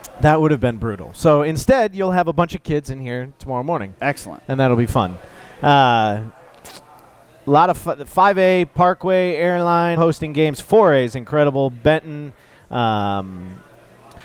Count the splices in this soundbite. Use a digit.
1